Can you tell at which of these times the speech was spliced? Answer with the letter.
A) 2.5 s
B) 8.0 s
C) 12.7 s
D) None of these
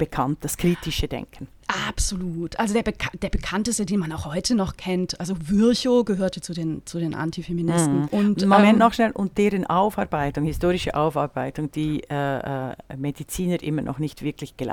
B